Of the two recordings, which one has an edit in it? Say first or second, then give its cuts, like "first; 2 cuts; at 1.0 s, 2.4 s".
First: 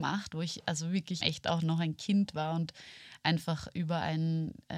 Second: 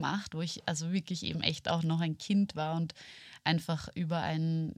first; 1 cut; at 1.2 s